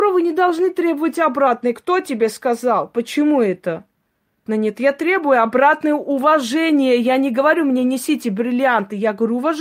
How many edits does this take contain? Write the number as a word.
one